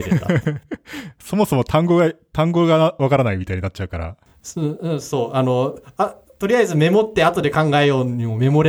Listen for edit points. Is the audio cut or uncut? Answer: uncut